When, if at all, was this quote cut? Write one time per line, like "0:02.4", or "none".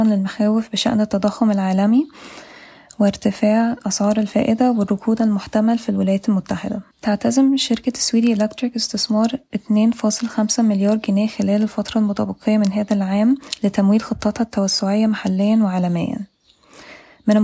0:06.9